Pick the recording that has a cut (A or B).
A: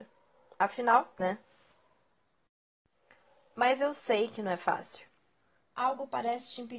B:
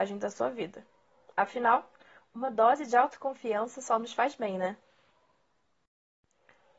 A